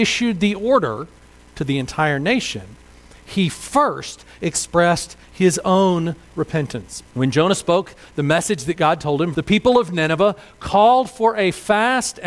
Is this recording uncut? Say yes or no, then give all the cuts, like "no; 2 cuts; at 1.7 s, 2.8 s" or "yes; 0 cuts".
no; 2 cuts; at 7.1 s, 9.3 s